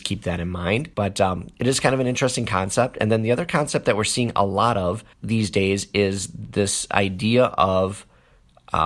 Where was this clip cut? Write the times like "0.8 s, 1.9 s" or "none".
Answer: 0.9 s, 5.1 s